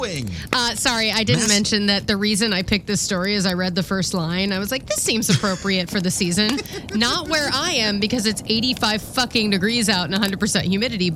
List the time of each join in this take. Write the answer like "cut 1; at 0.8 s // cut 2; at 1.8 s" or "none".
none